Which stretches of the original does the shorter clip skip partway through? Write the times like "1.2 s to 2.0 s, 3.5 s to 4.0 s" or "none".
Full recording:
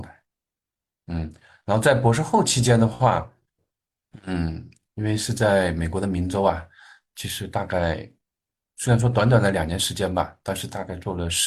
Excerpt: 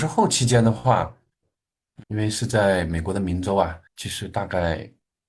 4.2 s to 4.9 s, 6.7 s to 7.1 s